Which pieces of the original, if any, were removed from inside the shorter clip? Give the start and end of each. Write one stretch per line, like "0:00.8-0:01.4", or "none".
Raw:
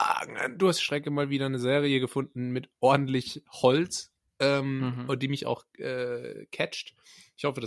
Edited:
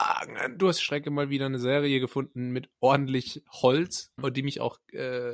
0:04.2-0:05.0